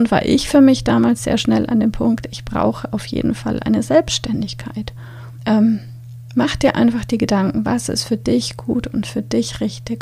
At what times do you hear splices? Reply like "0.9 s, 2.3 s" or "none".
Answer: 5.4 s